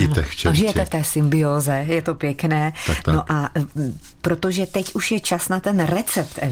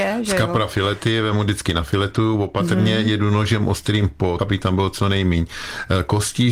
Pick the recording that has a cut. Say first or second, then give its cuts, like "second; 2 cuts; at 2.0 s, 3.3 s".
second; 1 cut; at 4.4 s